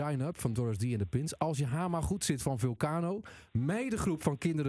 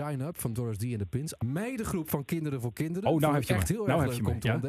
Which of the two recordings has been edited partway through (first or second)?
second